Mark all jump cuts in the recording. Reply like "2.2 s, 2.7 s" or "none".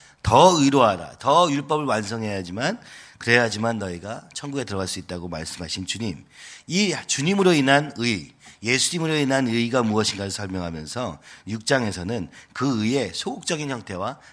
none